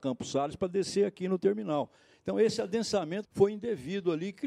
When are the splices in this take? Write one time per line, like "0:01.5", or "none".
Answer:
0:03.2